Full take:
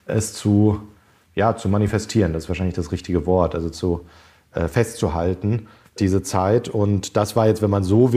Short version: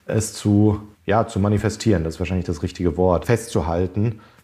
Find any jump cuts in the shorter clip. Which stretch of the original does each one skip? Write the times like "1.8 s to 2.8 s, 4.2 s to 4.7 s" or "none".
0.9 s to 1.2 s, 3.5 s to 4.7 s